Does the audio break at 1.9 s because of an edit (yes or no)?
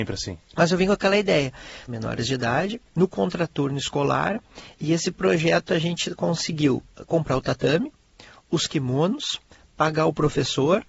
yes